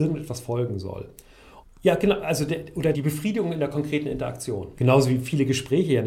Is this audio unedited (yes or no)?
no